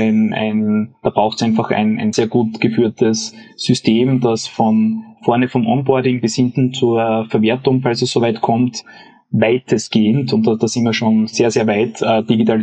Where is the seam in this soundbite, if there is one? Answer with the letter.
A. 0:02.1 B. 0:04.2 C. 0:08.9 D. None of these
A